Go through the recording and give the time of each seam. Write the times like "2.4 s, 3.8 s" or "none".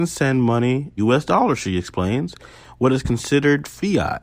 1.0 s